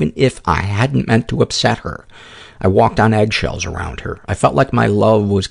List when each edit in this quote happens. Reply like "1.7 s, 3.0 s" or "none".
none